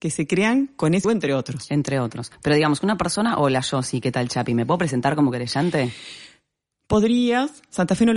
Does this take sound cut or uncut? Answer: cut